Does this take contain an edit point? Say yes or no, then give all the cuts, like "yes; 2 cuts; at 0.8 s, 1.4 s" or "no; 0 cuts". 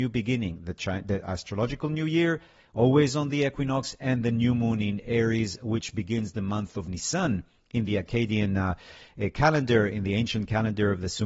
no; 0 cuts